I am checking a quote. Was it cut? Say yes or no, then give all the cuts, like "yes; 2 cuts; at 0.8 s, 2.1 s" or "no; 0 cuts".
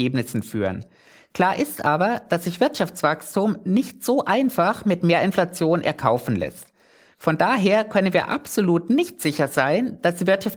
no; 0 cuts